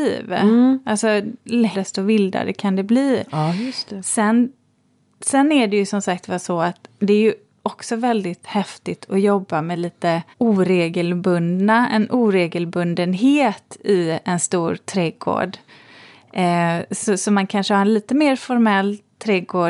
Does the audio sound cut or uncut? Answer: cut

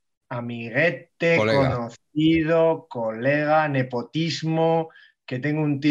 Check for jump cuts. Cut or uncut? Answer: uncut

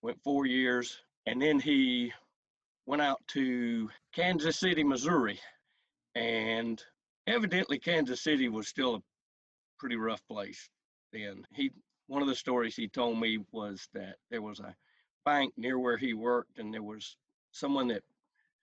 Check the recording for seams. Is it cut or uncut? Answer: uncut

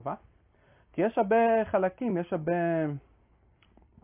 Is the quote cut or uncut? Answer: uncut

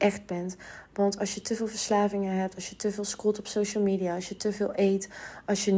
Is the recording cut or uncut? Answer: uncut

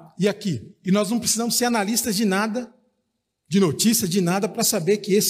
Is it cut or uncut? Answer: uncut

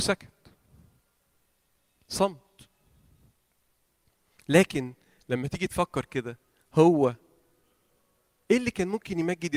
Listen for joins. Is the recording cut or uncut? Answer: uncut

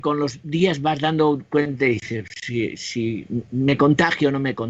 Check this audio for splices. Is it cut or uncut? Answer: uncut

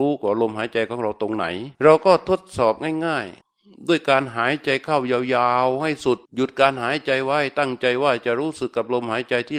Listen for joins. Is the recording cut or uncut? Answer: cut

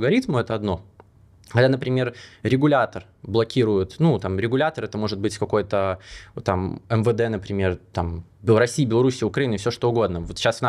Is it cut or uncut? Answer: uncut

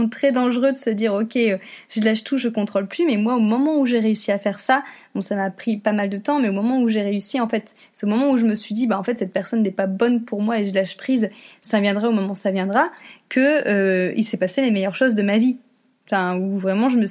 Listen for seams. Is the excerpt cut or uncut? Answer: uncut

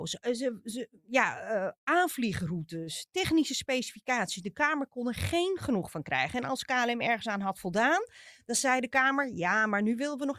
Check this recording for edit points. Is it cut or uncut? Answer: uncut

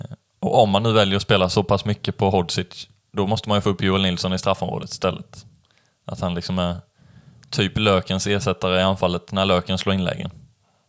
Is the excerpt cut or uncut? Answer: uncut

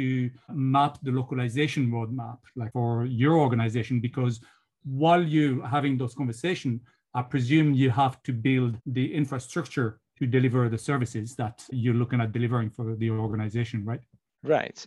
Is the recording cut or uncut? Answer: uncut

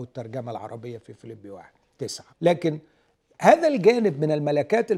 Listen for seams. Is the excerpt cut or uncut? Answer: cut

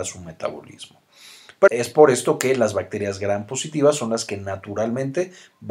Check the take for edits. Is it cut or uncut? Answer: cut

